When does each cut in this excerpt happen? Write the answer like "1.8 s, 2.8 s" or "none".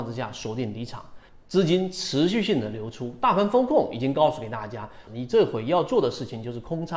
1.3 s, 5.1 s